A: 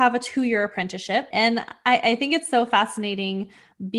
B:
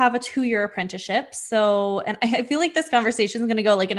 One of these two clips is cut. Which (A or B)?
A